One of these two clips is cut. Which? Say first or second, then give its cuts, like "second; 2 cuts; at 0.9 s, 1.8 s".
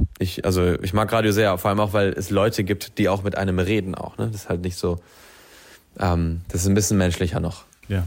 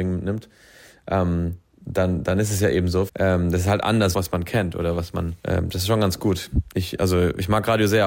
second; 3 cuts; at 3.1 s, 4.1 s, 5.4 s